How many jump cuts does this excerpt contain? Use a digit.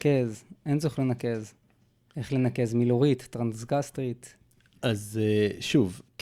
0